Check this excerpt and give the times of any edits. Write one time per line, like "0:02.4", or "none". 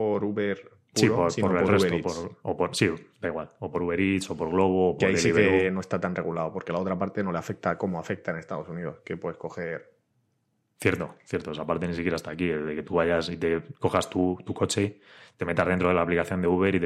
none